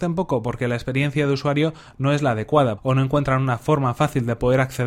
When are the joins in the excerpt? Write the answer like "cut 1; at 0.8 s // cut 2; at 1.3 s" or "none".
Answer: cut 1; at 2.8 s